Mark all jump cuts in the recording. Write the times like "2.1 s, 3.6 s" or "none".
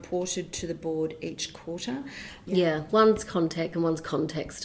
2.5 s, 3.7 s